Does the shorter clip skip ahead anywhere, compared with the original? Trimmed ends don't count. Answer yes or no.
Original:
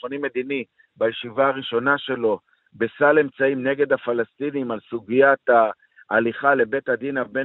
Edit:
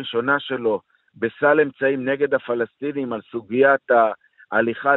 no